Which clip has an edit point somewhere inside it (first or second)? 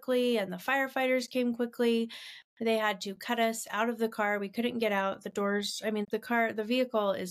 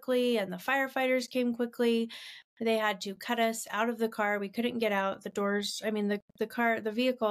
first